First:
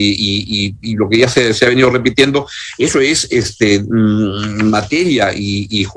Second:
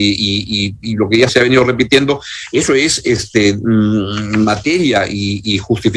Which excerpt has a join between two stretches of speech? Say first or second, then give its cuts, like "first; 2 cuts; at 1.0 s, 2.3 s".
second; 1 cut; at 1.3 s